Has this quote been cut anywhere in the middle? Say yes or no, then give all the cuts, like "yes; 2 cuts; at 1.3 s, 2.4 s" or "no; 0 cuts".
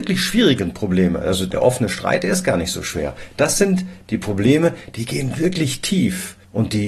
no; 0 cuts